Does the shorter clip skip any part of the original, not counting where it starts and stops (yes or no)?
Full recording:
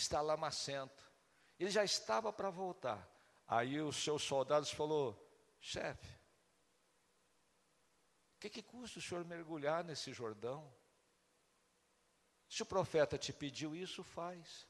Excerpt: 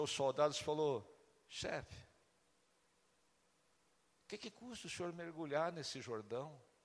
no